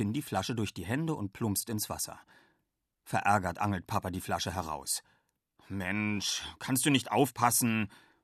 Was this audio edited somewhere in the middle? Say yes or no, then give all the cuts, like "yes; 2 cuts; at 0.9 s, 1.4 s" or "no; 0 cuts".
no; 0 cuts